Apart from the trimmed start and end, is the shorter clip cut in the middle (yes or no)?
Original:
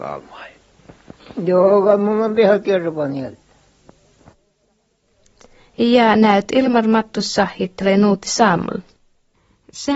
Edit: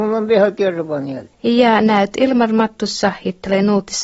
yes